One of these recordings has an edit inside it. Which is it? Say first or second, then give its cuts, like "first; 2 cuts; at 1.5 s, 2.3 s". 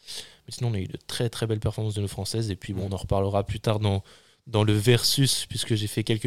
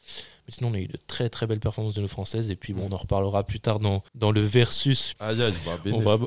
second; 2 cuts; at 4.1 s, 5.1 s